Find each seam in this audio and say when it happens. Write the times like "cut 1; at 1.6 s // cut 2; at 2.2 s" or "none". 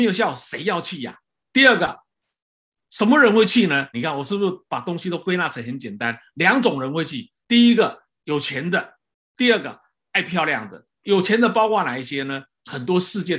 cut 1; at 1.4 s // cut 2; at 3.9 s